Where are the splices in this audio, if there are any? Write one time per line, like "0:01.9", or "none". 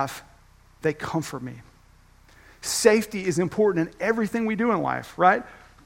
none